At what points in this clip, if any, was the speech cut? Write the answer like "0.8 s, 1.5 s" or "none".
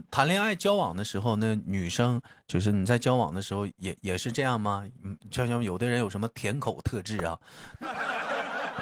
none

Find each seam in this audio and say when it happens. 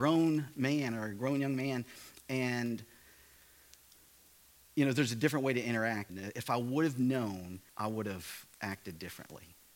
6.1 s, 7.7 s

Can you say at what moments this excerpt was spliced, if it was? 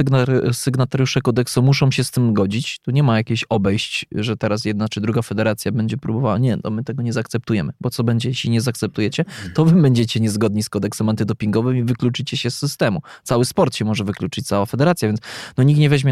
none

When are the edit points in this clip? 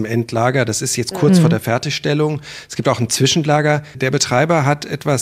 3.9 s

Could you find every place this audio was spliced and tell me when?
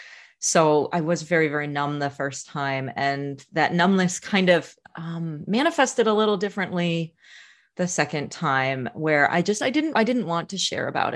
4.8 s, 9.9 s

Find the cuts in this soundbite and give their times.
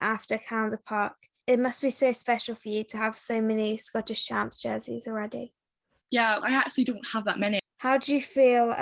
6.4 s, 7.6 s

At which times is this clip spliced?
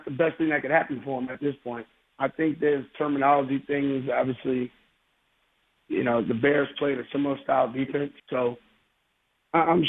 2.1 s, 8.2 s

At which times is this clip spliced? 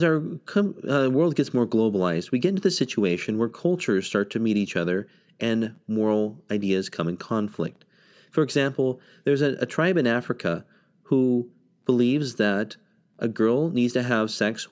none

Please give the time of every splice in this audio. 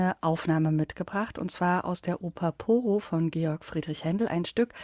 none

